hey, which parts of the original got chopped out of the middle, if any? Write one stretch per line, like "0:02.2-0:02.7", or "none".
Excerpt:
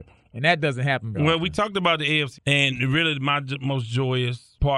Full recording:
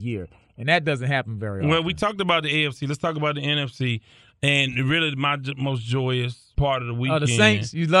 0:01.4-0:01.6
0:02.8-0:04.3